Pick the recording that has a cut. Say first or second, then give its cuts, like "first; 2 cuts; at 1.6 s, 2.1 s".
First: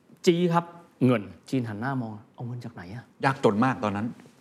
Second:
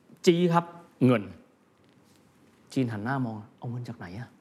first; 2 cuts; at 1.4 s, 3.1 s